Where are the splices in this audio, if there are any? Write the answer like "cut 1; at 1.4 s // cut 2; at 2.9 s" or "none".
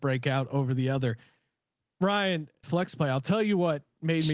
cut 1; at 2.6 s